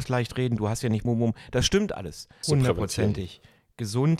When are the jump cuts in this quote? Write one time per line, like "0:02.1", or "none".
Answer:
0:01.1
0:02.4